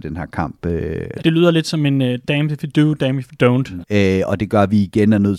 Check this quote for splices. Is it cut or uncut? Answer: cut